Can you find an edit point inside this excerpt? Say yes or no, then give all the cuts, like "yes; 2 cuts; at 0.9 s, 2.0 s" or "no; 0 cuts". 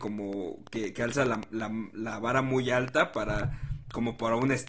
no; 0 cuts